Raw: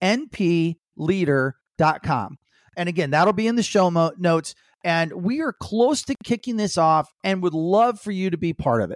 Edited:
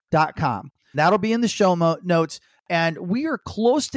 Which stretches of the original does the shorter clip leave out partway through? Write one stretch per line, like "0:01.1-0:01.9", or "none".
0:02.6-0:03.1

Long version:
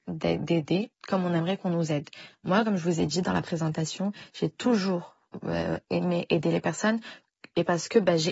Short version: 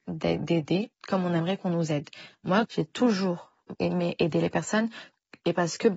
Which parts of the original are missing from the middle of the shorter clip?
0:02.6-0:04.3
0:05.4-0:05.9

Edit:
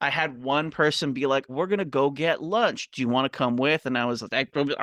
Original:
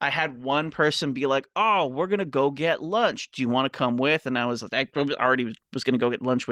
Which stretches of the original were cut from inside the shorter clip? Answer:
0:01.5-0:01.9

